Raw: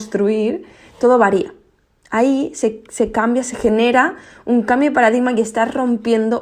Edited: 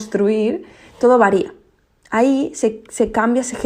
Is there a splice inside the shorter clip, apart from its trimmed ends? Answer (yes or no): no